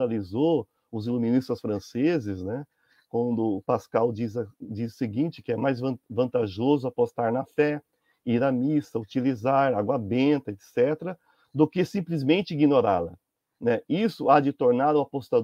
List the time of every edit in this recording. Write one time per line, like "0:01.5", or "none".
none